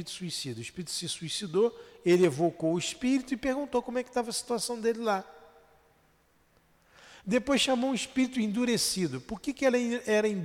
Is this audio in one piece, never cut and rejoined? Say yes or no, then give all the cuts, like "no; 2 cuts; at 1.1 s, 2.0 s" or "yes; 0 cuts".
yes; 0 cuts